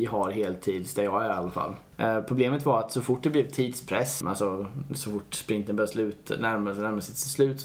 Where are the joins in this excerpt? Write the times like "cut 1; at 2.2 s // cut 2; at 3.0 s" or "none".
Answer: cut 1; at 1.9 s // cut 2; at 4.2 s

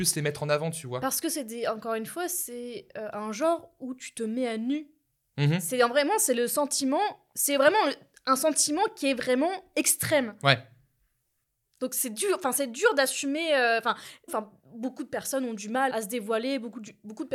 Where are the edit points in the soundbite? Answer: cut 1; at 14.3 s // cut 2; at 15.9 s

